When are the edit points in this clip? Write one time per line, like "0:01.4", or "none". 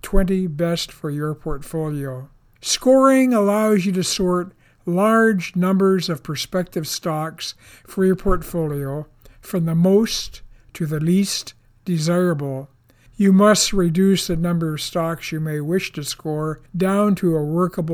0:02.6
0:13.1
0:16.7